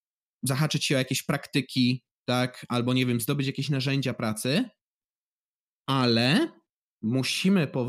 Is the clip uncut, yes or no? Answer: yes